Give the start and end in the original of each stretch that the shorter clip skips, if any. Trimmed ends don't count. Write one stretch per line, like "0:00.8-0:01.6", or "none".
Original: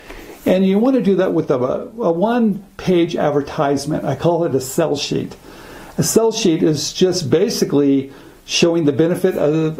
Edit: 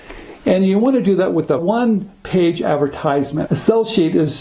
0:01.6-0:02.1
0:04.0-0:05.9